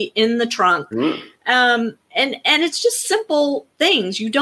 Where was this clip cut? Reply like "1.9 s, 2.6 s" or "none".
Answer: 0.9 s